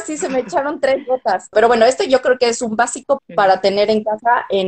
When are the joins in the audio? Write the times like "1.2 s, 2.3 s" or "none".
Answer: 1.5 s, 3.2 s